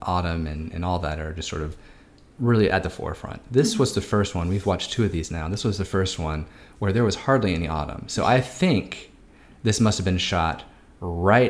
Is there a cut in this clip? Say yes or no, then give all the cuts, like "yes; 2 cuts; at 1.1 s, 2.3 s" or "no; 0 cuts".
no; 0 cuts